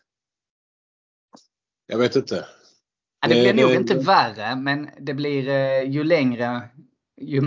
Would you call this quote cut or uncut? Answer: uncut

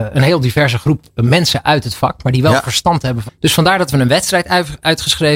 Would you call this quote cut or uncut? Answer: cut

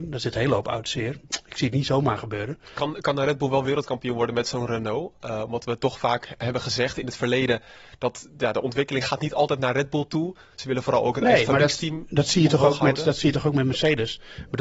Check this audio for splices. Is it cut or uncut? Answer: uncut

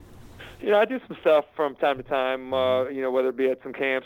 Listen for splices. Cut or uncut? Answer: uncut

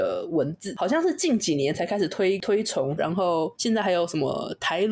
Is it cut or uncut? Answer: cut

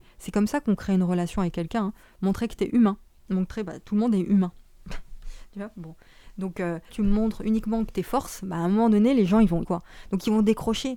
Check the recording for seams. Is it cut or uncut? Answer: cut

